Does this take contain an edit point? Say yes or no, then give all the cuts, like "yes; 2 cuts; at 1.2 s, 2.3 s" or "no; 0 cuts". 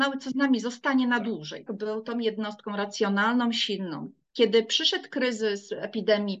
yes; 1 cut; at 1.7 s